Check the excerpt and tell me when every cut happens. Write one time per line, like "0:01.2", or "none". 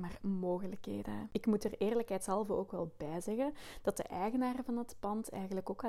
0:01.3

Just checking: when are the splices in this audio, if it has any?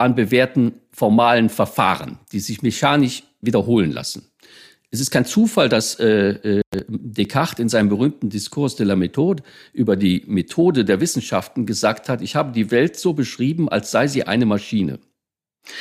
none

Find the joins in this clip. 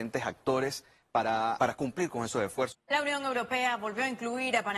0:01.6
0:02.7

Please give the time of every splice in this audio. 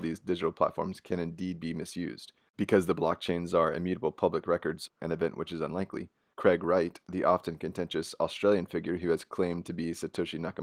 0:04.9
0:06.3

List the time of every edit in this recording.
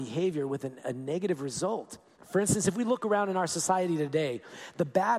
0:02.2

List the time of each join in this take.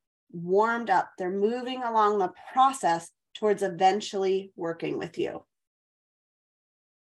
none

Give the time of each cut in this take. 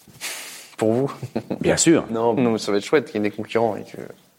0:02.4

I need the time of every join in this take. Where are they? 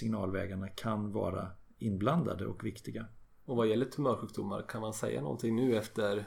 0:03.2

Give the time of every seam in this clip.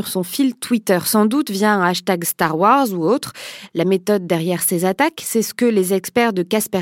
0:03.7

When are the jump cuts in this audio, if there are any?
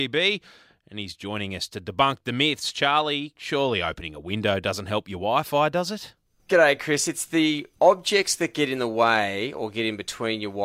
none

